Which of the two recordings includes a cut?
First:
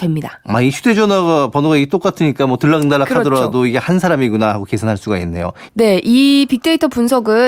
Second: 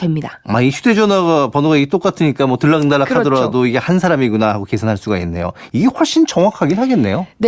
first; 1 cut; at 5.7 s

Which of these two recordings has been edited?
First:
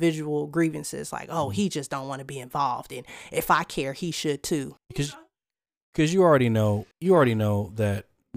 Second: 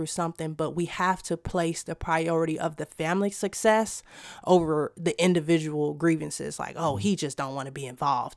first; 2 cuts; at 4.8 s, 6.9 s

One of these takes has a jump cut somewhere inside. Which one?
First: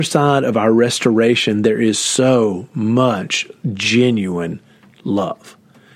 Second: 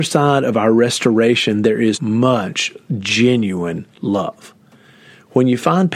second; 2 cuts; at 1.9 s, 3.9 s

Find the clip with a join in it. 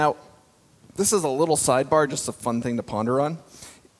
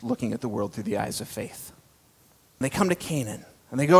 second; 1 cut; at 2.6 s

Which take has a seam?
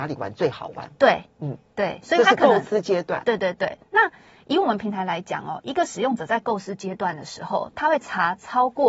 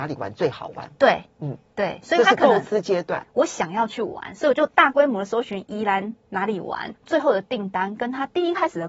second; 2 cuts; at 3.2 s, 6.9 s

